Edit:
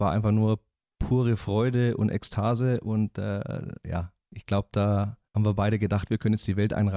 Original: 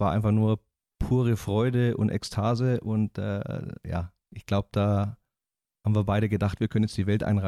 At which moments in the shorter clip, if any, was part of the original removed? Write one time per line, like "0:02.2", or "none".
0:05.3